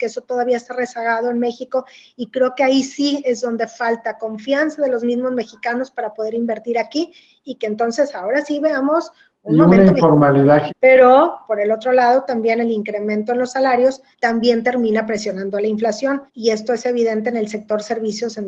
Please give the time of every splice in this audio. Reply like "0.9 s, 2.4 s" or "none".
10.7 s, 14.1 s, 16.3 s